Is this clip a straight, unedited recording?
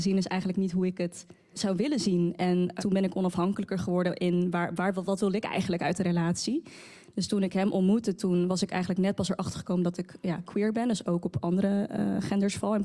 yes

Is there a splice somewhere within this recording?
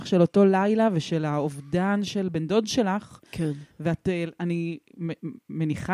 no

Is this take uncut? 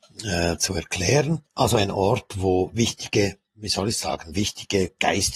no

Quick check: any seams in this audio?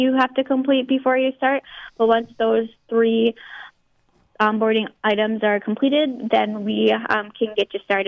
no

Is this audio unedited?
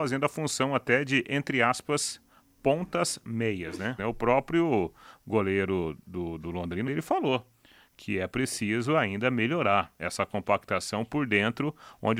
no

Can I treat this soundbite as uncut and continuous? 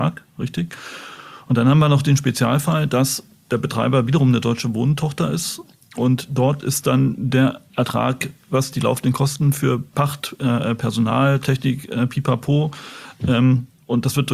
yes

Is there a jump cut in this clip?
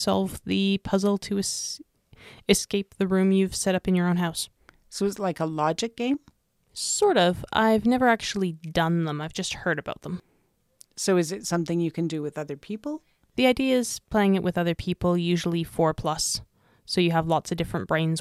no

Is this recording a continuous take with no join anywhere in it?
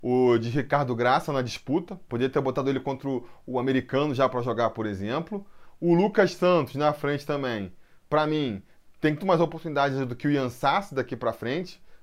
no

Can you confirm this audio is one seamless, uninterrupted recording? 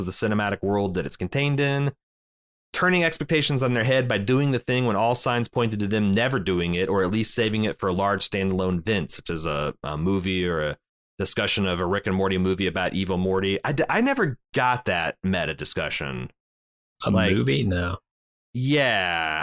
yes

